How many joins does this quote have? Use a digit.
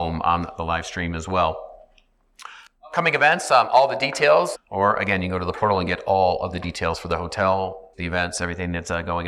2